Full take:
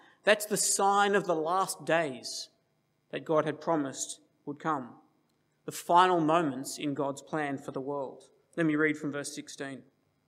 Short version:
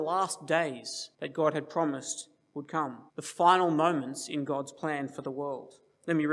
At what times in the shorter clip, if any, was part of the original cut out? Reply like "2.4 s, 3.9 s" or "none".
1.1 s, 3.1 s